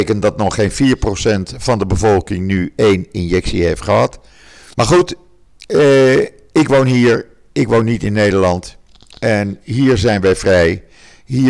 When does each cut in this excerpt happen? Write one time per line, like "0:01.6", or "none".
0:04.7